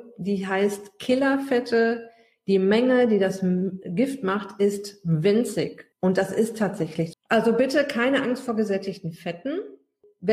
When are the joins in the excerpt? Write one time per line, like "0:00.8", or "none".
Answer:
0:05.9
0:07.1